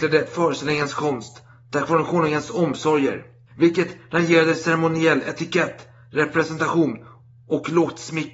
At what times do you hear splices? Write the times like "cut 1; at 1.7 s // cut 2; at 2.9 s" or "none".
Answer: none